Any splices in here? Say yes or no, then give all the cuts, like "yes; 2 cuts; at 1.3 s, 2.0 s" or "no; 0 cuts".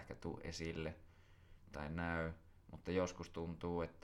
no; 0 cuts